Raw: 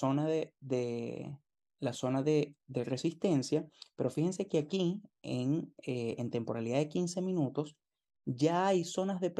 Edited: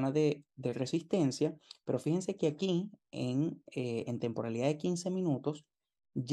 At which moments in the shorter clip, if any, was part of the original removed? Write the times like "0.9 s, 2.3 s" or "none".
none